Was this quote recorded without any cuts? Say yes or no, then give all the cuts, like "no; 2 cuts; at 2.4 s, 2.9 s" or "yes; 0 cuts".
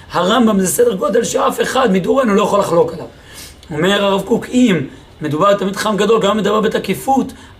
yes; 0 cuts